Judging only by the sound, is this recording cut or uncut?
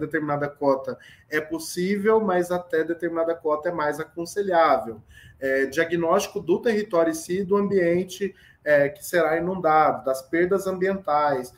uncut